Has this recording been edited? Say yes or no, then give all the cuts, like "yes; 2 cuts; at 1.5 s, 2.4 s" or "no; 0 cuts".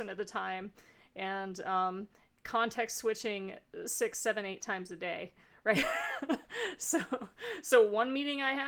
no; 0 cuts